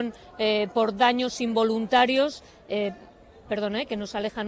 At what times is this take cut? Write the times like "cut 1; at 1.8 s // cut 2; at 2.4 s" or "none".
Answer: none

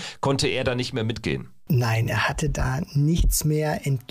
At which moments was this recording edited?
none

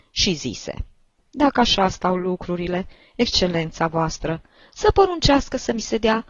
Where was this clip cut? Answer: cut 1; at 1.2 s

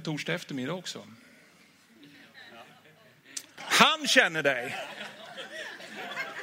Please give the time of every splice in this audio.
cut 1; at 3.6 s

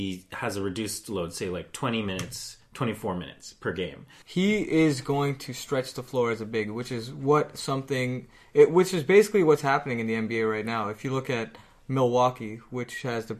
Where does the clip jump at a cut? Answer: cut 1; at 4.2 s

